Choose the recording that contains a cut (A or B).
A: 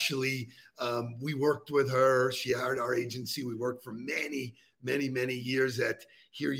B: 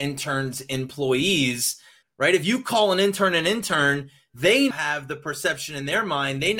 B